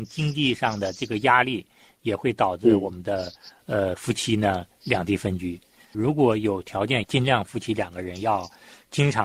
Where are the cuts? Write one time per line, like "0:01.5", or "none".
0:07.0